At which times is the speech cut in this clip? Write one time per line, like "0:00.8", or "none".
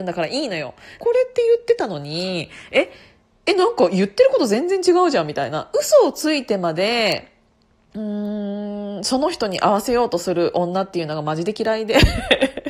0:01.0

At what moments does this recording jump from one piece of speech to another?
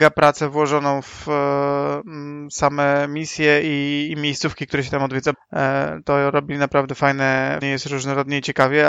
0:05.3
0:07.6

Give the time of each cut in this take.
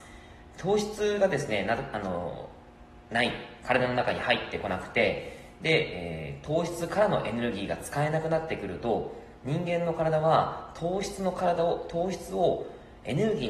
0:03.0

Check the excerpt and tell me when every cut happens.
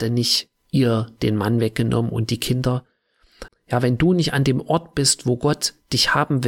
0:03.5

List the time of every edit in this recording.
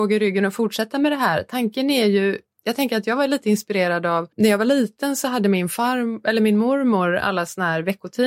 0:04.3

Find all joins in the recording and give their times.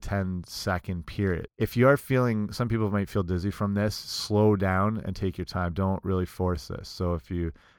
0:01.5

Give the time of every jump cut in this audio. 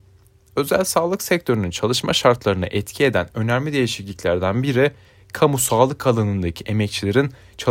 none

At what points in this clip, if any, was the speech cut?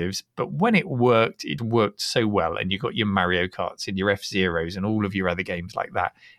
0:01.6

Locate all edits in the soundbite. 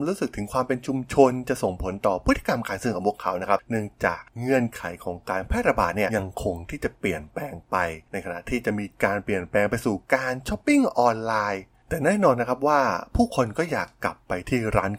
0:06.1

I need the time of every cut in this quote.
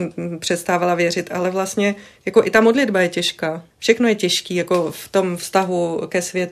0:03.7

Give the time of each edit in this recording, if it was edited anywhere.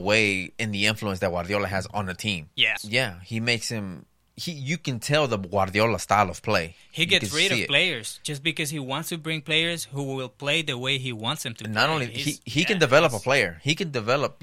0:02.8

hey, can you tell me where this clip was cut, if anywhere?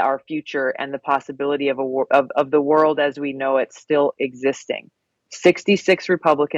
none

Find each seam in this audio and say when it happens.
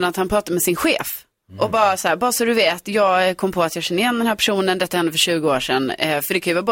none

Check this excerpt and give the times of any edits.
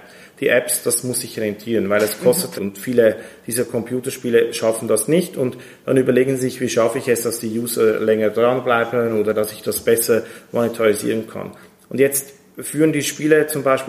0:02.5

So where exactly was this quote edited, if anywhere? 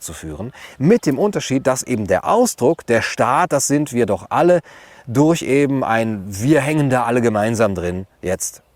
none

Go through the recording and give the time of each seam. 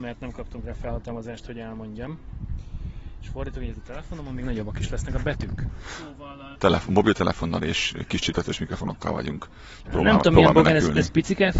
0:06.5
0:09.9

